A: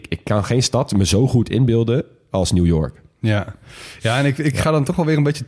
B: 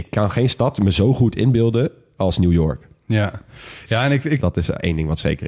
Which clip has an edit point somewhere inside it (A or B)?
B